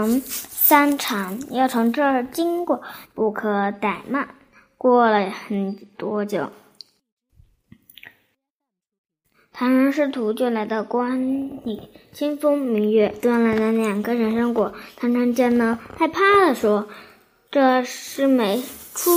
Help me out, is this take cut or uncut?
cut